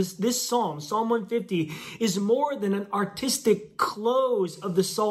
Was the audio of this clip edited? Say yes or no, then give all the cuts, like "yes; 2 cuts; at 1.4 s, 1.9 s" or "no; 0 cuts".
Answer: no; 0 cuts